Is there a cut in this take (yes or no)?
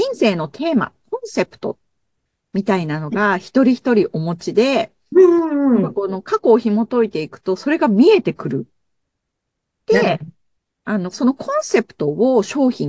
yes